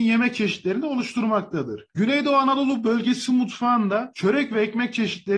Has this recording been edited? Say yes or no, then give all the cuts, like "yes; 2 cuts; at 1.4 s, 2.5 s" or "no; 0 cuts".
yes; 1 cut; at 1.9 s